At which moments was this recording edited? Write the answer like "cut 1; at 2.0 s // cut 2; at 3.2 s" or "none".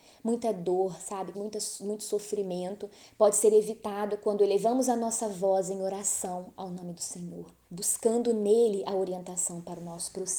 cut 1; at 1.3 s // cut 2; at 7.6 s